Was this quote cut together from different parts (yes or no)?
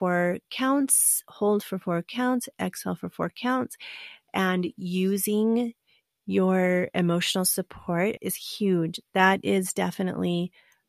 yes